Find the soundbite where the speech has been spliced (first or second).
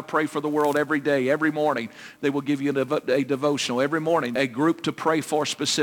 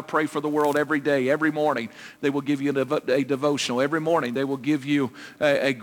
first